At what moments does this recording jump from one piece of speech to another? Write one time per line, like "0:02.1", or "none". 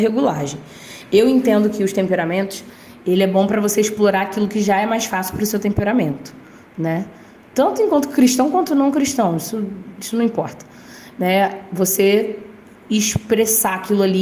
none